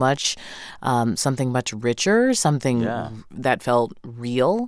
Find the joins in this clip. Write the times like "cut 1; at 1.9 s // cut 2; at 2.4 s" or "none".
none